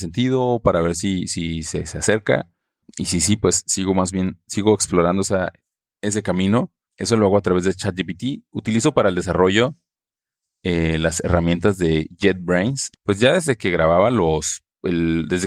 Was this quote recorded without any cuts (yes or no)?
no